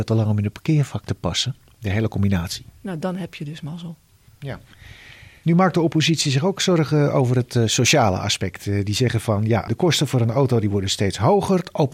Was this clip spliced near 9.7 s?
yes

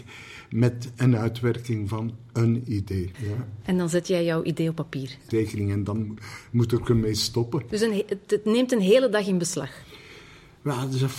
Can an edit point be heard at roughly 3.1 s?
yes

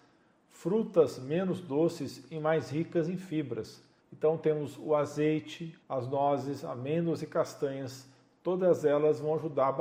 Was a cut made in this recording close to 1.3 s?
no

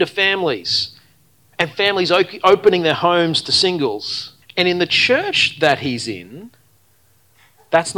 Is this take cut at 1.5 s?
no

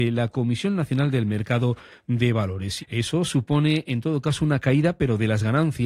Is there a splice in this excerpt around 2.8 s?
yes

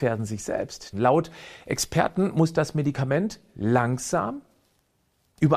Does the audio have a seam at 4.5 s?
no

